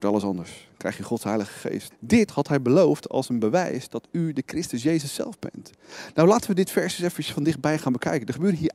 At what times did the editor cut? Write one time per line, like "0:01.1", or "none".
0:01.9